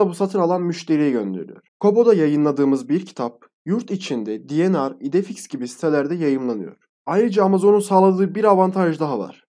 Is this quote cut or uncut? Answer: cut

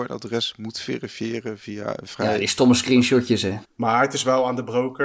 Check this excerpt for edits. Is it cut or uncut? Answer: cut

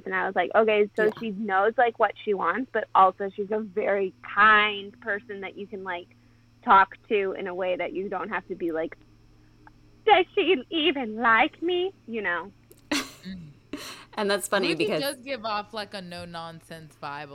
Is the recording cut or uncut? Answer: cut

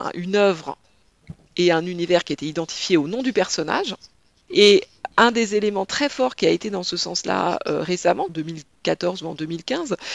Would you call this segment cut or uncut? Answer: cut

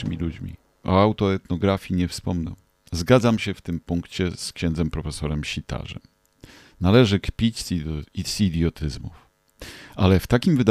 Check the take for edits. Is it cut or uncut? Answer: cut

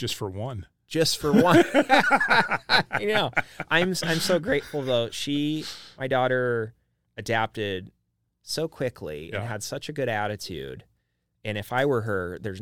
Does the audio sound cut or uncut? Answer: uncut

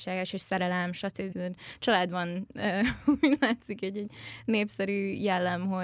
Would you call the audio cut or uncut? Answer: cut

